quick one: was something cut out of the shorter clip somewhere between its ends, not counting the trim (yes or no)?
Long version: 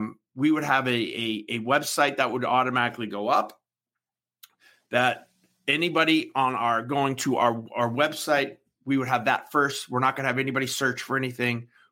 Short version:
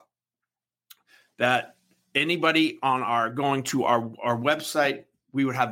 no